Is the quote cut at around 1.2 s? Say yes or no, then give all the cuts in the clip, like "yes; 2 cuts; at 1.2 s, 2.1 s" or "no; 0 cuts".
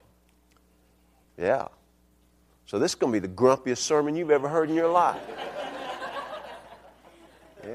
yes; 1 cut; at 1.2 s